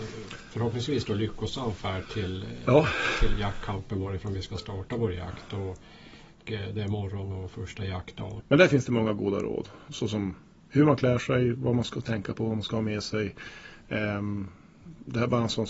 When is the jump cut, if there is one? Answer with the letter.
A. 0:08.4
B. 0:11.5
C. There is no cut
A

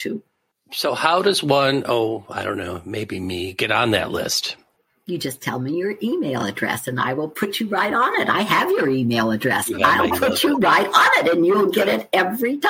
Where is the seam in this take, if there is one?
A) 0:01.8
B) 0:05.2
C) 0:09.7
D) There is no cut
D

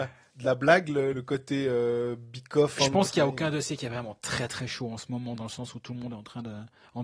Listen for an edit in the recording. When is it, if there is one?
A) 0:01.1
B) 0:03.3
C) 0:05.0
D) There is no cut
A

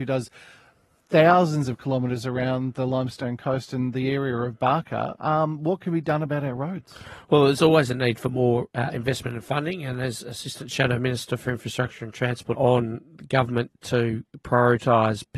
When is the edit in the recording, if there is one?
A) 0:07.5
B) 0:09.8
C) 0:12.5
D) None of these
C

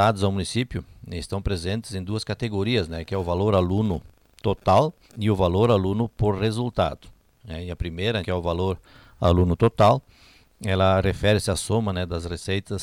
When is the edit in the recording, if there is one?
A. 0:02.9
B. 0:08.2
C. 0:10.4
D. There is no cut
B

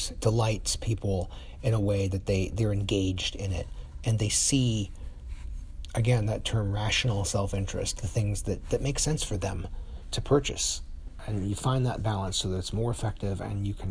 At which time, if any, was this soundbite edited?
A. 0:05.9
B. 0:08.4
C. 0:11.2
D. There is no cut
C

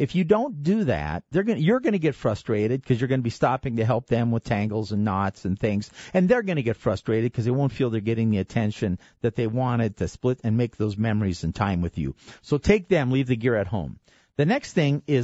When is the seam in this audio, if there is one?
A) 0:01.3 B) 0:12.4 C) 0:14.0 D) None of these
A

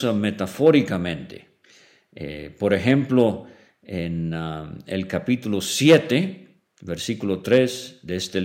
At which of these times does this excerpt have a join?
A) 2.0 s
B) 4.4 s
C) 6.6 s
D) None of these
D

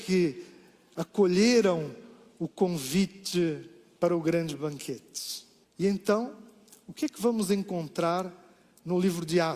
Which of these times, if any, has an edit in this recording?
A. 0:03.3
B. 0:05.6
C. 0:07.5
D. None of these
B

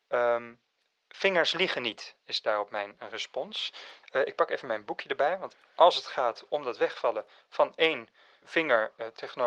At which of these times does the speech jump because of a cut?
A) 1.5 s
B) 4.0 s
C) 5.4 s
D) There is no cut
B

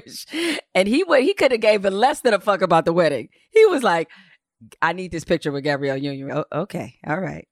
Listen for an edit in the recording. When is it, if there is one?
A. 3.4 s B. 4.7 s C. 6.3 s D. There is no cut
C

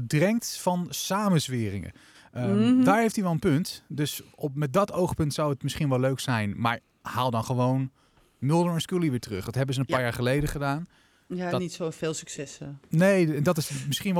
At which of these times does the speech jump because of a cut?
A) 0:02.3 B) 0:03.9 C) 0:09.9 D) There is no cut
D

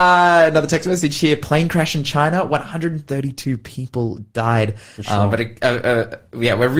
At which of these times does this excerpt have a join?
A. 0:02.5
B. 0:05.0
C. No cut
B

